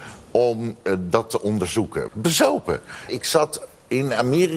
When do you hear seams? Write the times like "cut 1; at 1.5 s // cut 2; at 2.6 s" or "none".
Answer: cut 1; at 2.1 s // cut 2; at 3.1 s